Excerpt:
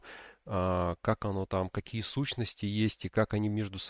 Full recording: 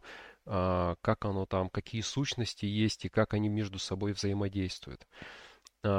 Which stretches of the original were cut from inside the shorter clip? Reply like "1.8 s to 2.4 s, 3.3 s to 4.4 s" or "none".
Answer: none